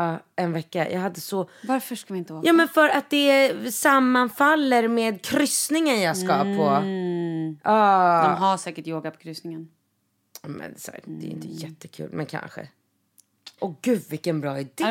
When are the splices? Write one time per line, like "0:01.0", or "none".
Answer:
0:11.0
0:13.6